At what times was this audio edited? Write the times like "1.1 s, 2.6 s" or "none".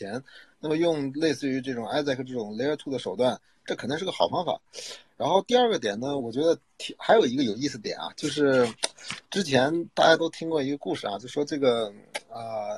6.2 s